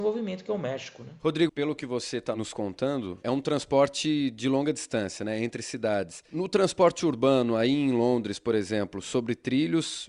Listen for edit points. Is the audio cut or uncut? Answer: cut